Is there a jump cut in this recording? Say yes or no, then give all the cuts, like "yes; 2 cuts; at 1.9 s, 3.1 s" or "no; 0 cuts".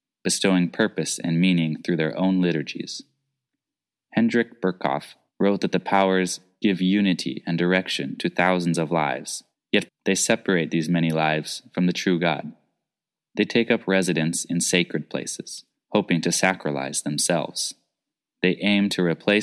yes; 2 cuts; at 9.9 s, 13.3 s